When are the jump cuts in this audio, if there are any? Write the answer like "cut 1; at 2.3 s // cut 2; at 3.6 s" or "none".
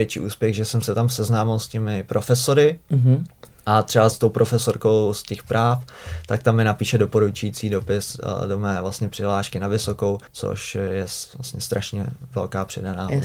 cut 1; at 4.1 s // cut 2; at 10.3 s